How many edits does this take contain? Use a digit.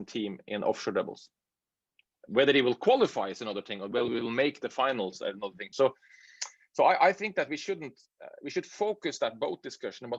2